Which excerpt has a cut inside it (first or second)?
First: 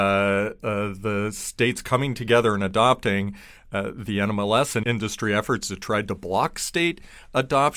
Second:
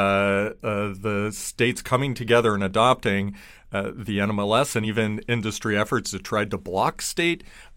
first